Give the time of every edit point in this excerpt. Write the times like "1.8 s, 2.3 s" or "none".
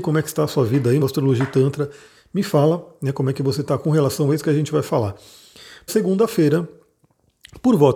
1.0 s, 5.9 s